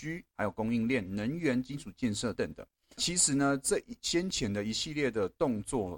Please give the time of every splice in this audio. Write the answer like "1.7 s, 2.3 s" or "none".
2.3 s